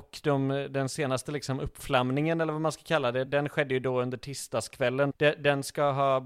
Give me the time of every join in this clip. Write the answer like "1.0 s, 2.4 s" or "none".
3.3 s, 5.1 s